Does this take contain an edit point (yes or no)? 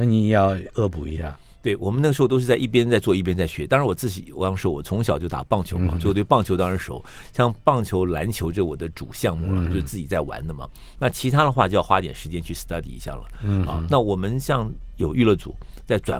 no